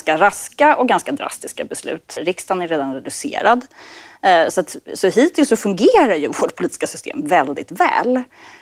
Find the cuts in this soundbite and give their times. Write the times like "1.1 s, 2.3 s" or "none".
2.2 s